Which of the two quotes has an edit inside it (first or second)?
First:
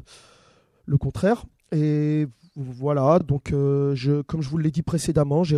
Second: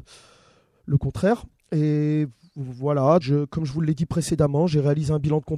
second